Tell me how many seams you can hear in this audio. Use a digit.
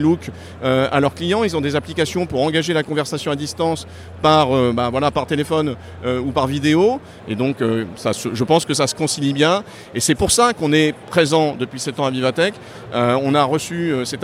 3